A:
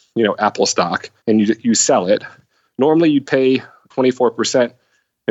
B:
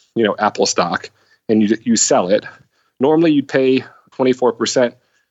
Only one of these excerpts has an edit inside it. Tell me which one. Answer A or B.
A